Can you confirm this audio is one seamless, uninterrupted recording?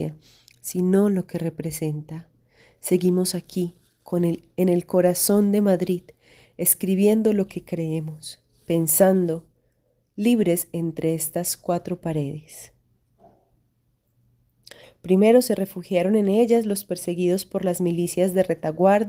no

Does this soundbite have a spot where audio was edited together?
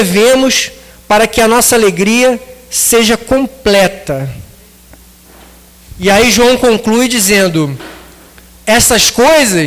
no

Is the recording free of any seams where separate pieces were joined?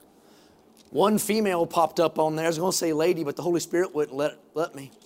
yes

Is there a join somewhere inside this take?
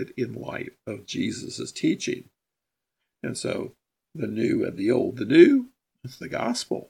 no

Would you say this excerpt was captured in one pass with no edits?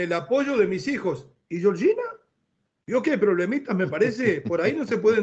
yes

